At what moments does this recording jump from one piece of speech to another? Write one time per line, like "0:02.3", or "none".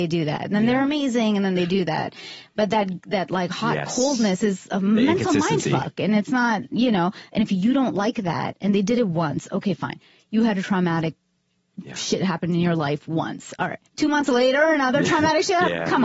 0:13.9

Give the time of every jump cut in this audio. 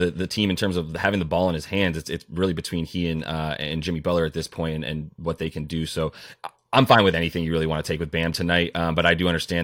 none

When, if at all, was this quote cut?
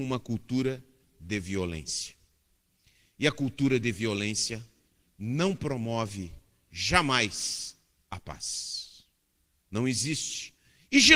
0:09.6

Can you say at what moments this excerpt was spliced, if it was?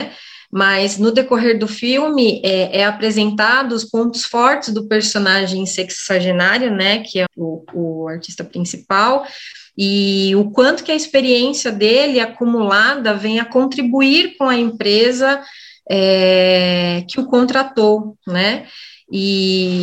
0:07.3

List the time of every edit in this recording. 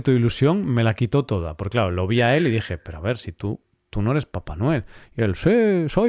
none

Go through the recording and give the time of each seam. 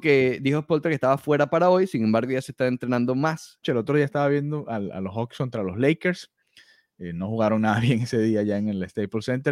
0:03.6

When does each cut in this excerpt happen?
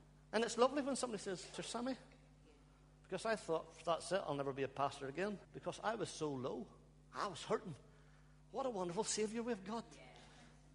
0:01.5
0:05.4

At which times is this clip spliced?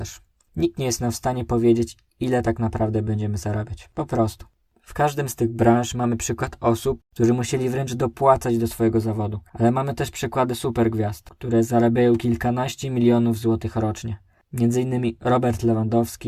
0:07.0

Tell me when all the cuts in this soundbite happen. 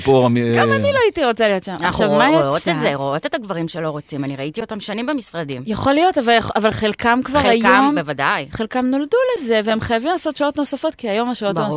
none

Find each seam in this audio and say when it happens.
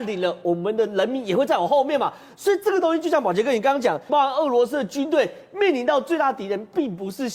0:04.1

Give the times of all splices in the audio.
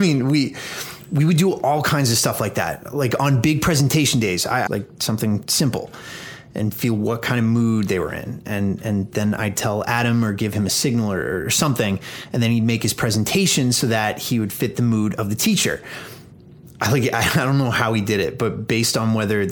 0:04.7

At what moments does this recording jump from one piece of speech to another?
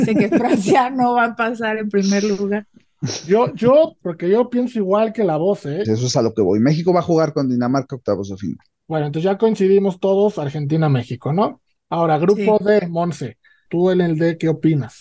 0:04.0
0:05.8
0:13.7

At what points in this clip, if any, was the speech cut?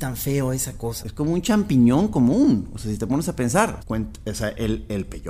0:01.0
0:03.8

